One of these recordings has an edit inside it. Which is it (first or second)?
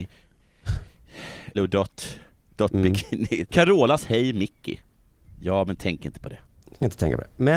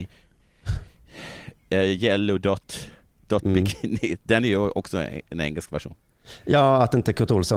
first